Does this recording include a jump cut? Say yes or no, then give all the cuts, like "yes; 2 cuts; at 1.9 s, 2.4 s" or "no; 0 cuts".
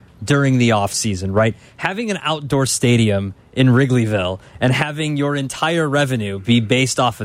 no; 0 cuts